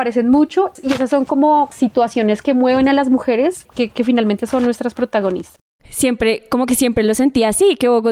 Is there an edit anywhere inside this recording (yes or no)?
yes